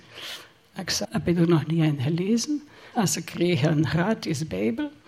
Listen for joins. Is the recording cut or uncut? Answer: cut